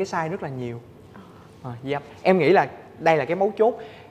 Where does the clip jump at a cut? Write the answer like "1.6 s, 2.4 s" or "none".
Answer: none